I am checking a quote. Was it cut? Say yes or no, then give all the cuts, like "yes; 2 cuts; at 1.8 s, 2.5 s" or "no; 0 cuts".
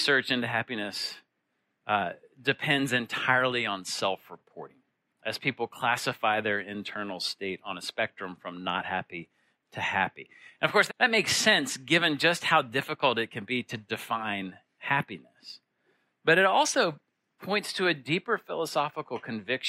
yes; 1 cut; at 10.9 s